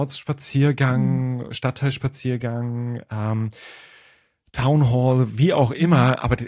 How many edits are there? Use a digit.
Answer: 0